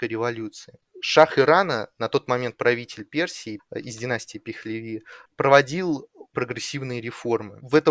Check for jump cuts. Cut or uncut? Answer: cut